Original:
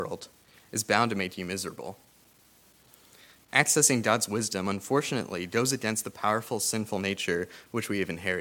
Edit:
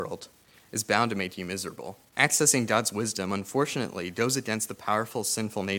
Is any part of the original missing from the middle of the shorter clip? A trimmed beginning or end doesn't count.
yes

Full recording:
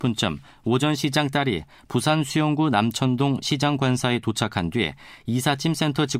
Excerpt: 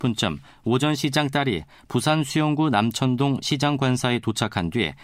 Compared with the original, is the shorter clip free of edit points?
yes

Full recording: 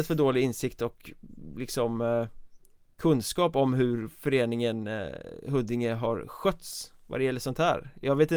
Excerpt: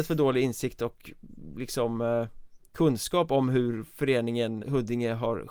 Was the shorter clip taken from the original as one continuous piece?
no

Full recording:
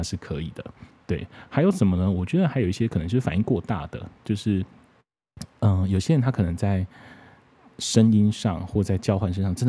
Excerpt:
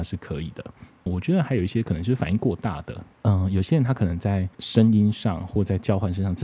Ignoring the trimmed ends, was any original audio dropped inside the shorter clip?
yes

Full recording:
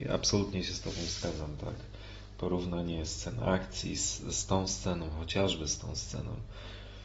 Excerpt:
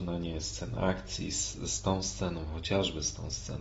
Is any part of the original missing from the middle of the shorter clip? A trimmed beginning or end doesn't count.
no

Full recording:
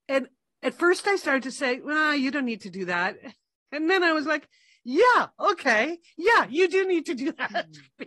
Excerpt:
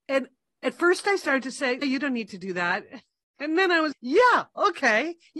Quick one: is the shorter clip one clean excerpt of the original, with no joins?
no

